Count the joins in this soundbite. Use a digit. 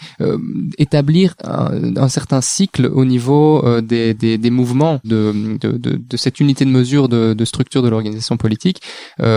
1